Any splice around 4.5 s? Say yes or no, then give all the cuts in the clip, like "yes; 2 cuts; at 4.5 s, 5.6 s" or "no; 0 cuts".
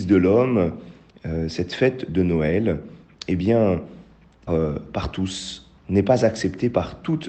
yes; 2 cuts; at 4.5 s, 5.8 s